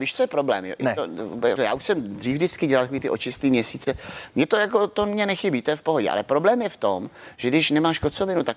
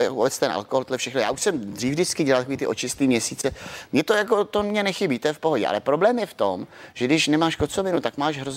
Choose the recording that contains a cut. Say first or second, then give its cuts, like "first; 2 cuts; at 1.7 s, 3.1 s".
first; 1 cut; at 1.6 s